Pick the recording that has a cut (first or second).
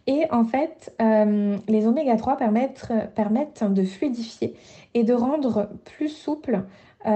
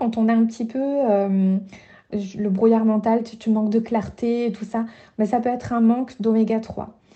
second